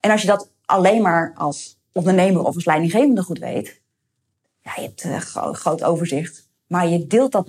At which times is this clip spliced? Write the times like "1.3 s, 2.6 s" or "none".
none